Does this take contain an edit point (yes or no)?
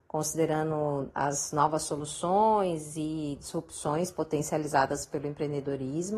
no